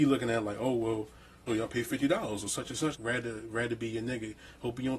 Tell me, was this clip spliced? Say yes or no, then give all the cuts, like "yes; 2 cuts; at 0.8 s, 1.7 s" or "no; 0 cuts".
yes; 2 cuts; at 1.5 s, 2.9 s